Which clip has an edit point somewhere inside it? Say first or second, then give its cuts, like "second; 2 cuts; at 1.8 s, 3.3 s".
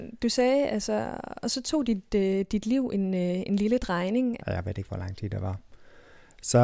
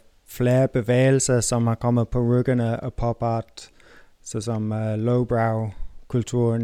first; 1 cut; at 4.4 s